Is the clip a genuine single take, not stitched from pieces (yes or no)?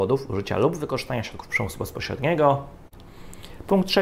yes